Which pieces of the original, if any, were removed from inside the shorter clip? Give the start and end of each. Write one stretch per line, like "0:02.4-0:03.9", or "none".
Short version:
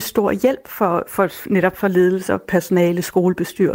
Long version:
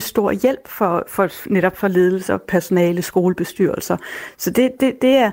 none